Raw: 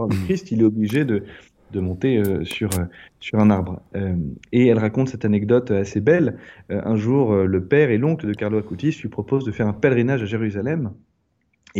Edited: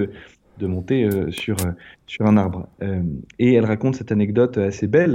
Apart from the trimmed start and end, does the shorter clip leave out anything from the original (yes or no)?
no